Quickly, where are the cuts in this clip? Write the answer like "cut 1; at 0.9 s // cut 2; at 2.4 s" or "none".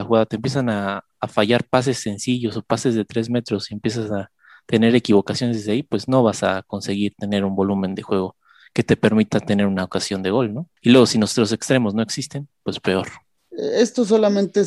none